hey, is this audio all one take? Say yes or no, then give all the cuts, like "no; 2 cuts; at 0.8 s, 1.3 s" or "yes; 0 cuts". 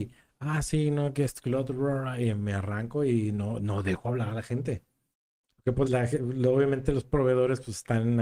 no; 1 cut; at 5.8 s